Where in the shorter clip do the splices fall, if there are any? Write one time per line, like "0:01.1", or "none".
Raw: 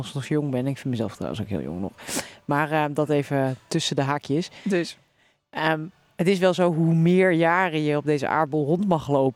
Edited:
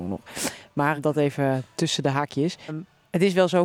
0:01.0
0:02.7